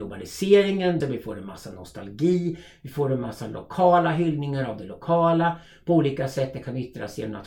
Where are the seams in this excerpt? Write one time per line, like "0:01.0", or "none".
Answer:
0:01.0